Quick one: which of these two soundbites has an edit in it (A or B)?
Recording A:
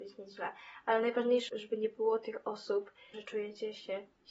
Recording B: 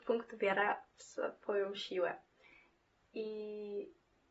A